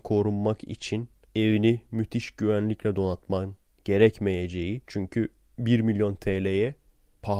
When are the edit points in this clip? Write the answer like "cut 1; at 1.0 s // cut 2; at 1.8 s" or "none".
cut 1; at 4.8 s